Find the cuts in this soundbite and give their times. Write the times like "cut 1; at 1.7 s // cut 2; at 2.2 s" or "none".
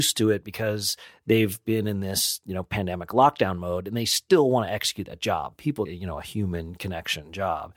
cut 1; at 5.9 s